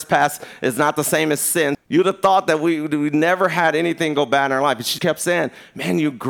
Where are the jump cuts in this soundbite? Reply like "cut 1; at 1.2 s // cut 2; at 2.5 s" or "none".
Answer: cut 1; at 1.7 s // cut 2; at 5.0 s

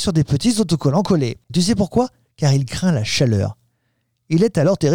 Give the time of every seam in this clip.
cut 1; at 1.5 s

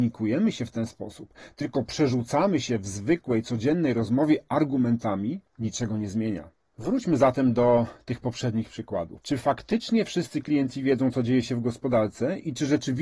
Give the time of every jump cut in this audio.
none

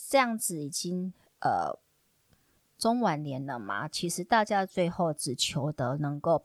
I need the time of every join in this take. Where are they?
none

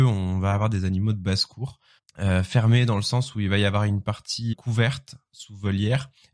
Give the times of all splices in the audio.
cut 1; at 2.0 s // cut 2; at 4.5 s

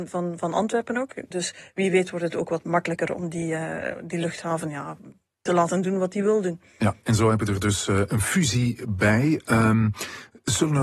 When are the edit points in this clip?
cut 1; at 1.3 s

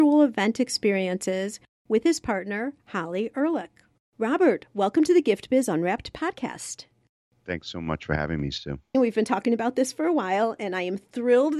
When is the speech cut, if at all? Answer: cut 1; at 8.9 s

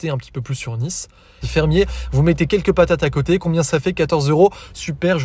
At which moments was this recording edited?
cut 1; at 1.4 s

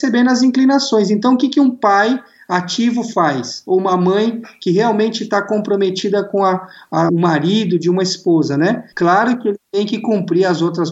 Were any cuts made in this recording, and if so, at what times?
cut 1; at 7.1 s // cut 2; at 8.9 s

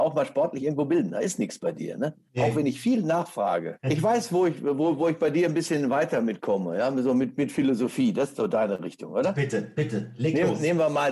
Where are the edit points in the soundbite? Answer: none

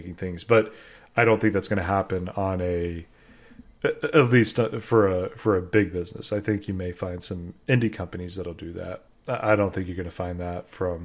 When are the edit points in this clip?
cut 1; at 9.1 s

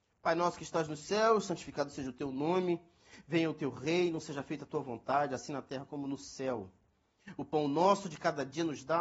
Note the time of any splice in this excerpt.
none

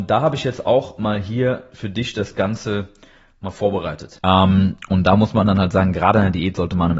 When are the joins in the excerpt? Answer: cut 1; at 4.2 s

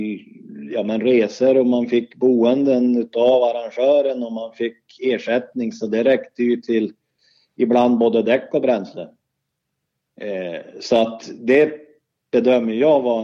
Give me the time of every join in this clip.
none

